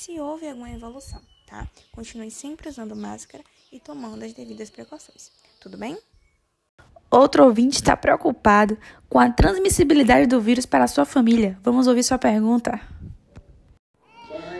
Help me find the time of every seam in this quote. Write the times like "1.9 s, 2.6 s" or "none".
none